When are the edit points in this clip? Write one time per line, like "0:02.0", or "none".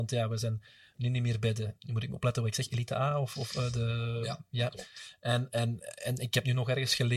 none